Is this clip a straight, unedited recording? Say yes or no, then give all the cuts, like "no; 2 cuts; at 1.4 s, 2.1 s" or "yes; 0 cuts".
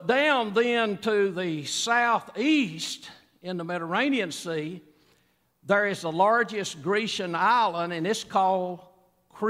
yes; 0 cuts